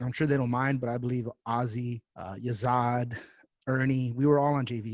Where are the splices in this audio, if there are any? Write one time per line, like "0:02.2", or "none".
0:02.1
0:03.5